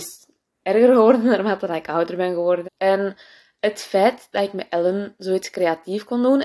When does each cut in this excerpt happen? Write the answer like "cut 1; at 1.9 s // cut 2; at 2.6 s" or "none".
cut 1; at 2.6 s